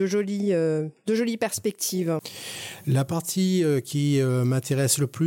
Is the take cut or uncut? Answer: uncut